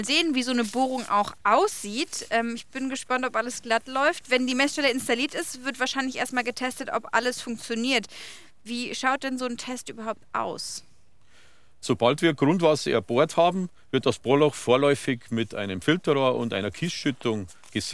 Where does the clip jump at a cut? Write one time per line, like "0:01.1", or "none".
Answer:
none